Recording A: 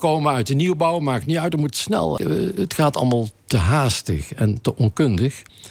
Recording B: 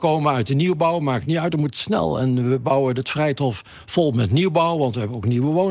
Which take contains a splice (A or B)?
A